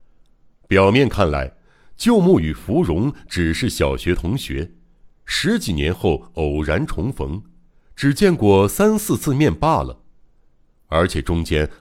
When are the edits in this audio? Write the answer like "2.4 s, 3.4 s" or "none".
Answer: none